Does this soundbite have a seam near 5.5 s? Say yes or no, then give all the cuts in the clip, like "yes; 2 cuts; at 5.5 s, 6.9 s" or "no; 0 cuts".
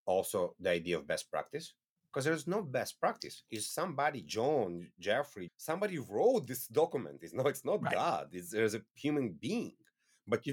yes; 1 cut; at 5.5 s